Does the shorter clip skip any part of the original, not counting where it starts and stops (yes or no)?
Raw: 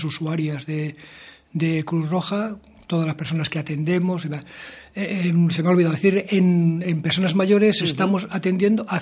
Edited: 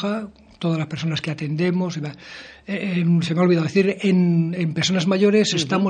no